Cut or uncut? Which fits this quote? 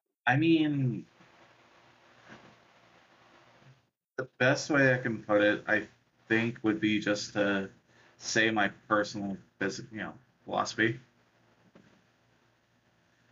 uncut